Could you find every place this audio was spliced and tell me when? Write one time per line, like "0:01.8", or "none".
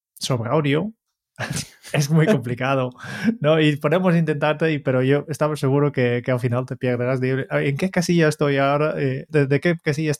none